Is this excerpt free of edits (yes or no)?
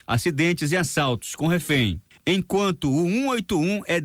yes